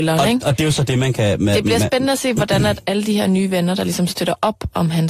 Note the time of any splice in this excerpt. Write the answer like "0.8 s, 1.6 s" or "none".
none